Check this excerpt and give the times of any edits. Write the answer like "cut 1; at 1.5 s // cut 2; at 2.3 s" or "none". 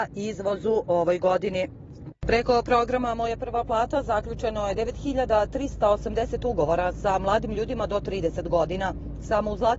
cut 1; at 2.1 s